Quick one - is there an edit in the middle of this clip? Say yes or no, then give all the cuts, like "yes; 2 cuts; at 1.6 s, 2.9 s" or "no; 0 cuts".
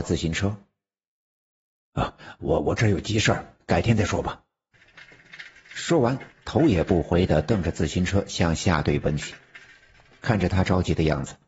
no; 0 cuts